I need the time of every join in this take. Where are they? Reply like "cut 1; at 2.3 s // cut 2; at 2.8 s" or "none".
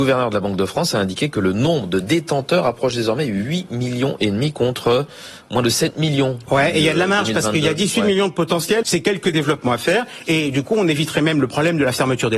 cut 1; at 8.8 s